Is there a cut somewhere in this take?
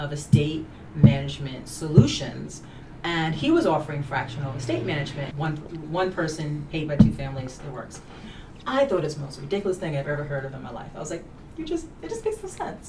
yes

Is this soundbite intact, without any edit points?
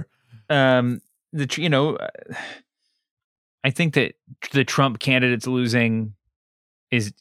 yes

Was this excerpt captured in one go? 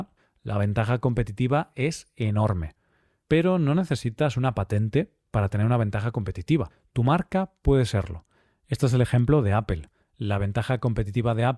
yes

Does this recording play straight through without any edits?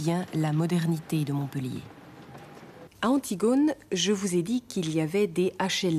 no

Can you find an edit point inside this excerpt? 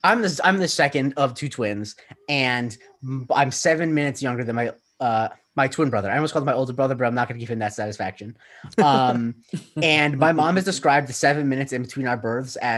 no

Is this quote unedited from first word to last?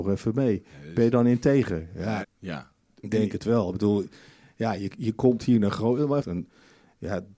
no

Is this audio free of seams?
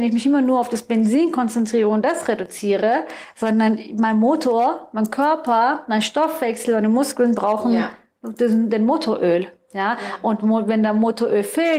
yes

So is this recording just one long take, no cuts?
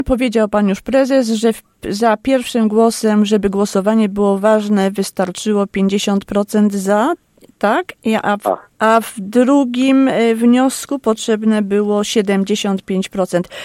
no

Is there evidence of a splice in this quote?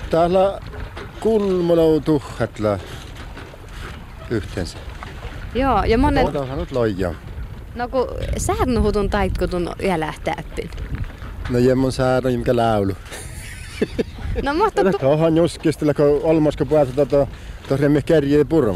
yes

